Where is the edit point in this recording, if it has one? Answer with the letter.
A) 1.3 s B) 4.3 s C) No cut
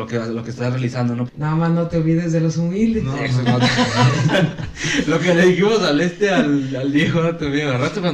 A